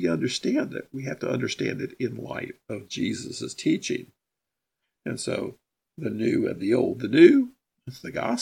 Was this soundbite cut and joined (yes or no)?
no